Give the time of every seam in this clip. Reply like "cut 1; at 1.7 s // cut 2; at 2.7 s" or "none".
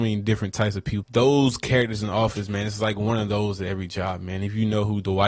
cut 1; at 1.0 s